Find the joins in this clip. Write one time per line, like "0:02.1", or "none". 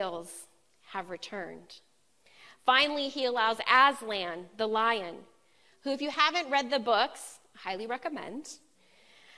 none